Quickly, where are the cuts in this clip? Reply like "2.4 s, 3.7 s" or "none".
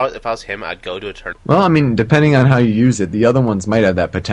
1.3 s